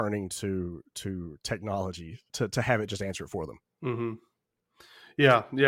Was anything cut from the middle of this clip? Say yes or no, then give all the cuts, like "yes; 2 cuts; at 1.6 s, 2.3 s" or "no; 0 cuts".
yes; 1 cut; at 2.3 s